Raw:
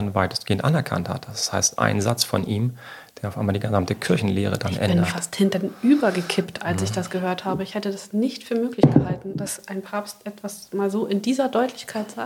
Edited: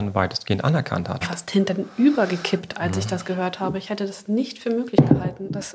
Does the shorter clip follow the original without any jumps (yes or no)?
no